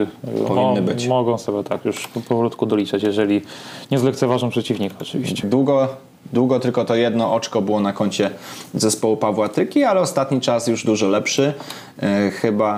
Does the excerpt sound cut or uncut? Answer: cut